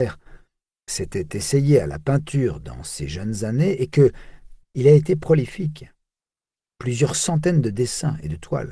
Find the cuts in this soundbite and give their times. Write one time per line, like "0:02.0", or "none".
0:04.6